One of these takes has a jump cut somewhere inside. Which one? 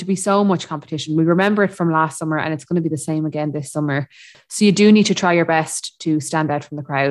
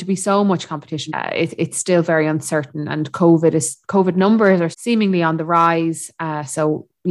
second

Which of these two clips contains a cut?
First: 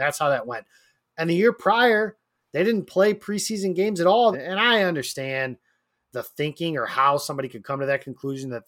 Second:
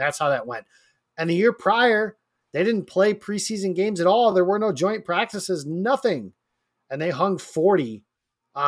first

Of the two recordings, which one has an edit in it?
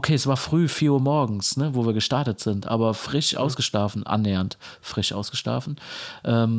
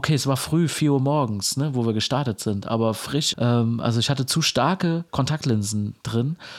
second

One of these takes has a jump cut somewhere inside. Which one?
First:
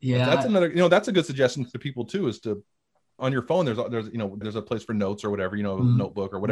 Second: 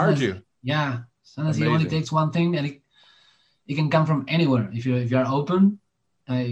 first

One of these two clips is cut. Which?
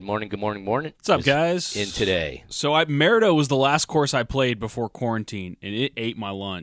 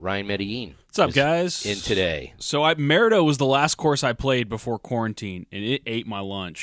first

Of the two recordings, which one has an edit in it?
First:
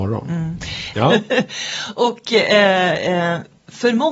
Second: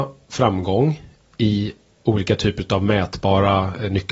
first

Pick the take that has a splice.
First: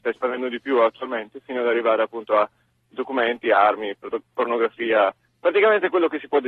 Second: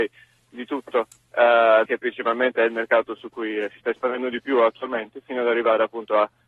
second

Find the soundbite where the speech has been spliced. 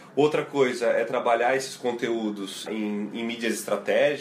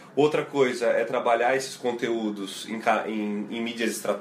first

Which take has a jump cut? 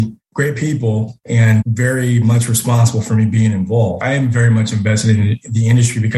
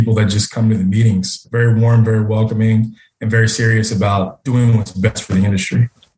first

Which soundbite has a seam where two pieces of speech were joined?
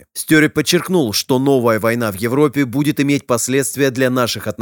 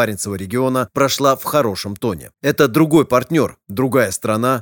second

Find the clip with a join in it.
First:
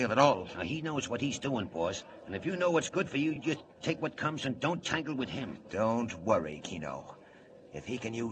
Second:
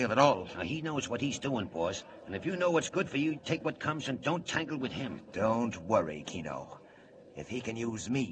second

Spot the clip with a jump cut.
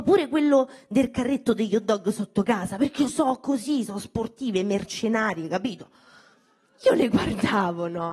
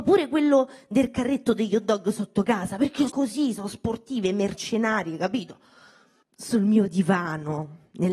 second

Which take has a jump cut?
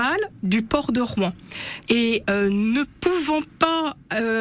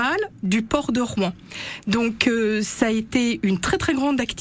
first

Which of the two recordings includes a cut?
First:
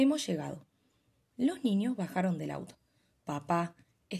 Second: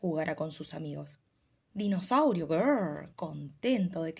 second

